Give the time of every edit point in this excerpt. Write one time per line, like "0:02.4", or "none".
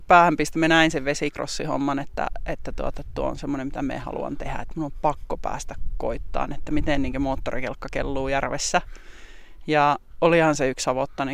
none

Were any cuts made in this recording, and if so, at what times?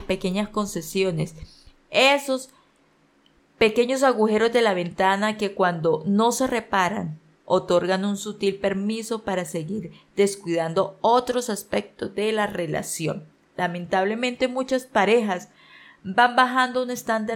0:07.4

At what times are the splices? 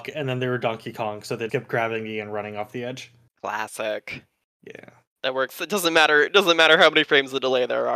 0:01.5

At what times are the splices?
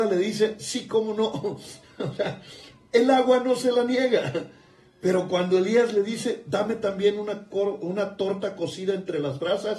none

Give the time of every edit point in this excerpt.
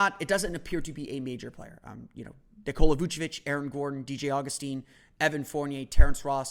none

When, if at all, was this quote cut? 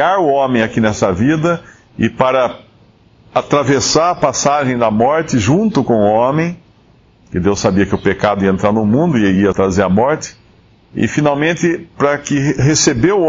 0:09.5

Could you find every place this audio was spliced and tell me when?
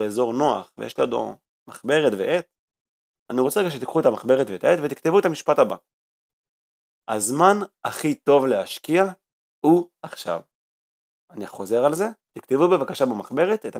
none

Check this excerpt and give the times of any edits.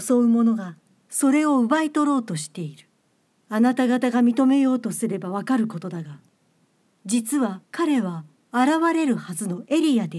0:03.4
0:07.6

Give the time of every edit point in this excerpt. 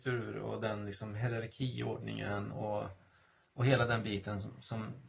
none

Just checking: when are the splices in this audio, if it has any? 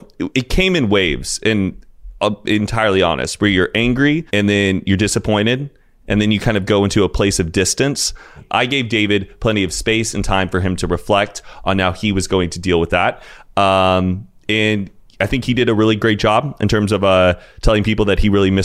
0:04.3

